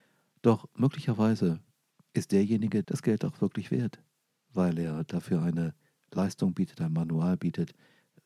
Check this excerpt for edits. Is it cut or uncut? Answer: cut